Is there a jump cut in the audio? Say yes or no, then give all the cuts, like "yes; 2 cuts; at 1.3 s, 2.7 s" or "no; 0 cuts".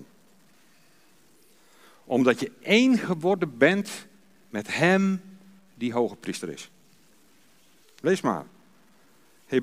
no; 0 cuts